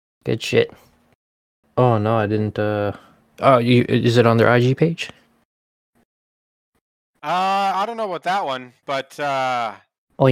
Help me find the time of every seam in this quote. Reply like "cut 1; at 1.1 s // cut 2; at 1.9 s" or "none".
cut 1; at 1.6 s